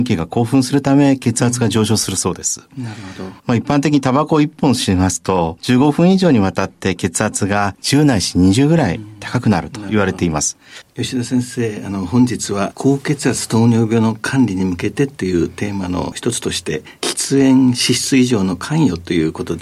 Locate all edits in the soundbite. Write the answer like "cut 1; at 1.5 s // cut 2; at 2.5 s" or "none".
cut 1; at 10.8 s